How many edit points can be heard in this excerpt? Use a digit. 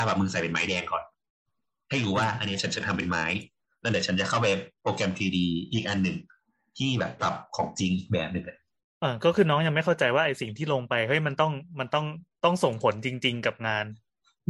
1